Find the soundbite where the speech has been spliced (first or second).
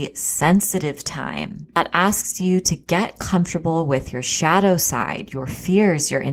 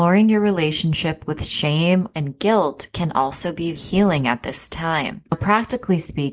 second